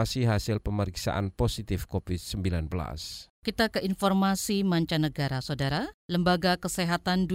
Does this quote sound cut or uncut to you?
uncut